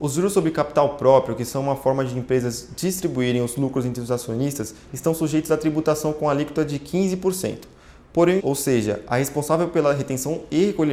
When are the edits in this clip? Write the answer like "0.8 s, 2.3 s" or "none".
8.4 s